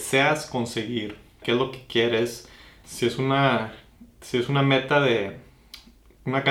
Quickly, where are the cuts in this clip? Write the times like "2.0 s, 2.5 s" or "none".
1.4 s, 2.8 s